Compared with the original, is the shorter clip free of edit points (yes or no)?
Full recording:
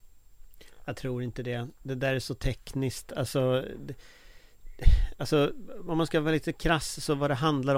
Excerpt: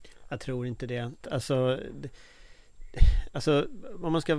no